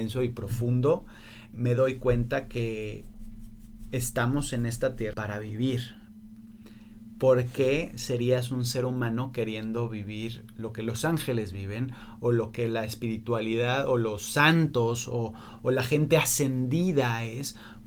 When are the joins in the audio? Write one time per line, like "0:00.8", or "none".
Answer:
0:01.5
0:05.1